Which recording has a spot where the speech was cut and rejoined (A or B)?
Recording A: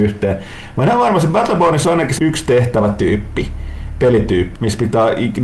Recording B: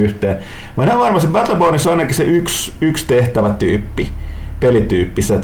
A